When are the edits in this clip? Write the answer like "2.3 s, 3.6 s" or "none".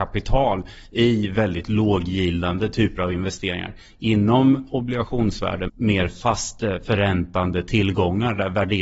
5.7 s